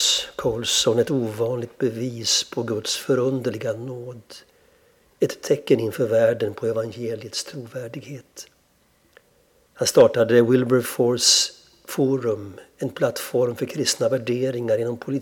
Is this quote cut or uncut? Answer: cut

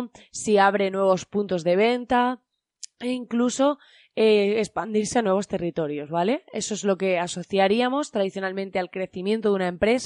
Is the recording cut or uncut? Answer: uncut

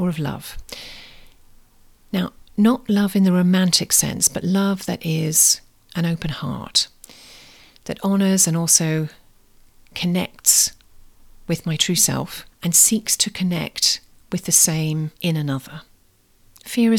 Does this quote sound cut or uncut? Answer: cut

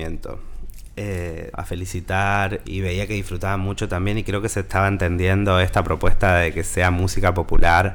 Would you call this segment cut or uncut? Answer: cut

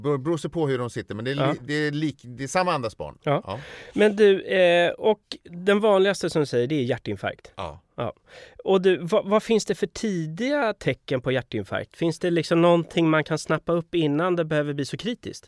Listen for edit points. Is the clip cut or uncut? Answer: uncut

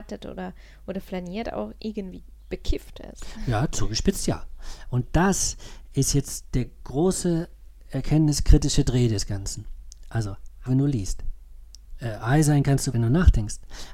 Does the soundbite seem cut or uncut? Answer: cut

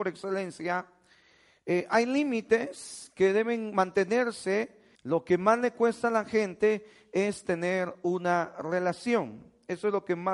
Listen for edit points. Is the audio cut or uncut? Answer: cut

